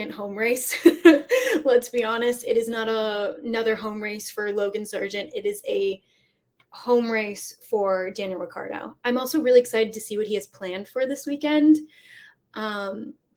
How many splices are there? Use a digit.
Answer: 0